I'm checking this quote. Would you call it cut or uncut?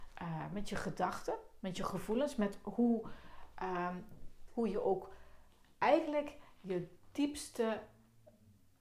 cut